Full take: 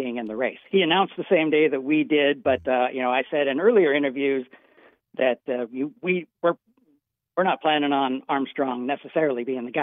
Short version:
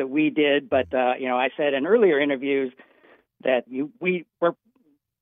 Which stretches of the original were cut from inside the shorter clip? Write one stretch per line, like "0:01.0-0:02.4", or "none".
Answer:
0:05.4-0:05.7